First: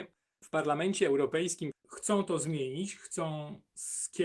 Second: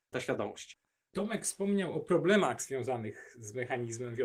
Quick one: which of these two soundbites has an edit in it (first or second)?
first